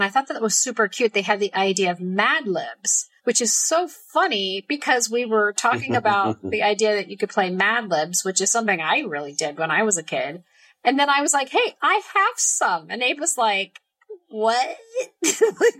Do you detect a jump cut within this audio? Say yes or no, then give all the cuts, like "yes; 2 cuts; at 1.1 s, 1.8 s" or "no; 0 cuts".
yes; 1 cut; at 3.2 s